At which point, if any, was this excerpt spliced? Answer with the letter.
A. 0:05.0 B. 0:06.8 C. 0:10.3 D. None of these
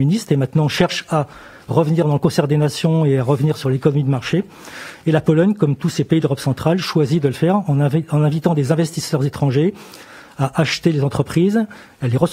D